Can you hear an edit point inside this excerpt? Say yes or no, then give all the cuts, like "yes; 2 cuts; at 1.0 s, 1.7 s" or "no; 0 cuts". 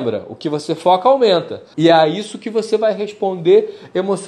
yes; 1 cut; at 1.7 s